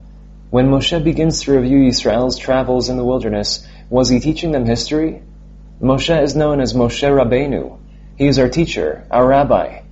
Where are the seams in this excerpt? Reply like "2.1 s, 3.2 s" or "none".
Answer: 5.8 s